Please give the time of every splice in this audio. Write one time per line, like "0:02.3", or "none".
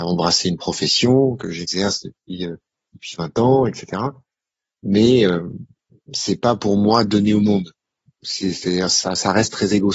none